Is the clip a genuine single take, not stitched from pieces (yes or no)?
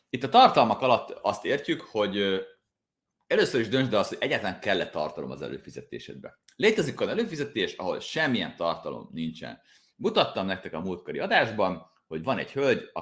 yes